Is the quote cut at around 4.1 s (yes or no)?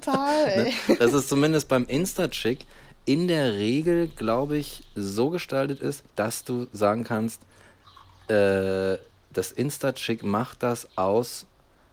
no